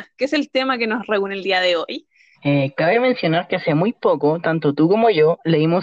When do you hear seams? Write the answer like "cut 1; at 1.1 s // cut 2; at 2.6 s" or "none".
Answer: cut 1; at 2.3 s